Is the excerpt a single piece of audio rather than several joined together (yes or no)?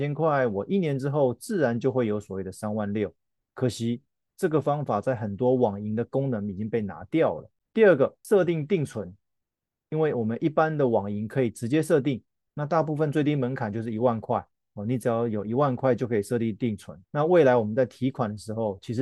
no